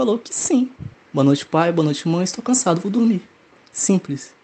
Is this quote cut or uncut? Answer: cut